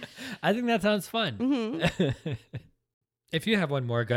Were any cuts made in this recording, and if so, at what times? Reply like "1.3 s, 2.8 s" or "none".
none